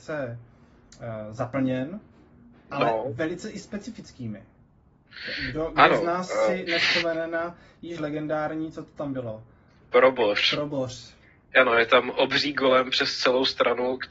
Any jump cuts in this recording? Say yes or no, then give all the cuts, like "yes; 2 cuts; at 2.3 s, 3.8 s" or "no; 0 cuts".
no; 0 cuts